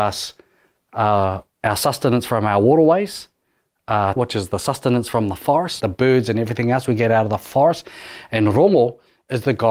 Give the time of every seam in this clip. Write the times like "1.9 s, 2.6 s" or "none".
4.2 s, 5.8 s